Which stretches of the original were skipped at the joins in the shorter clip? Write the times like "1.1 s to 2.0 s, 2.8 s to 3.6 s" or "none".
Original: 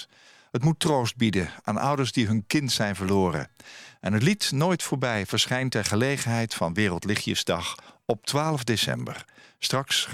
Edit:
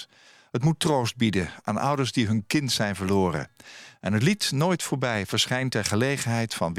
none